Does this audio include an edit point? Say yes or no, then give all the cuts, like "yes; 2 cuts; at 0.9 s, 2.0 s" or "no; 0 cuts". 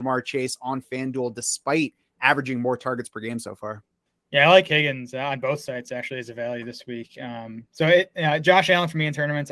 no; 0 cuts